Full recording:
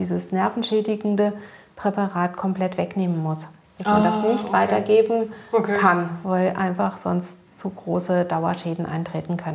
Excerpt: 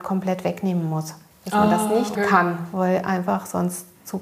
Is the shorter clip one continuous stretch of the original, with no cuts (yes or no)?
no